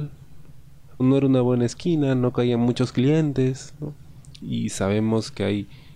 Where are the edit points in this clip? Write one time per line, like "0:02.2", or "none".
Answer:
0:01.0
0:04.4